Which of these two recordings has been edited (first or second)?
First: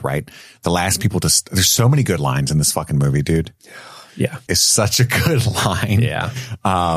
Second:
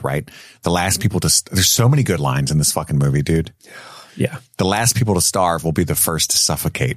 first